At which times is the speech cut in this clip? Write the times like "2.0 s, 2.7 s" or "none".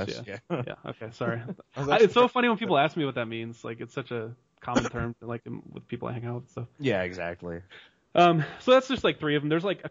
none